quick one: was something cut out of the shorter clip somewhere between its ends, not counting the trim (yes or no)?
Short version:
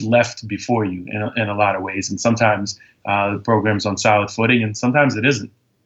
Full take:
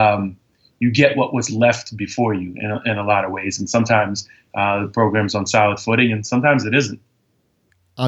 no